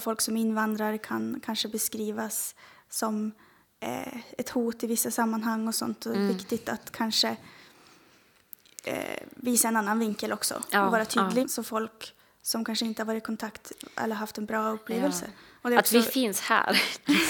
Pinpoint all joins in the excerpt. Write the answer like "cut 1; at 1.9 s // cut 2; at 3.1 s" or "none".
cut 1; at 11.4 s // cut 2; at 15.6 s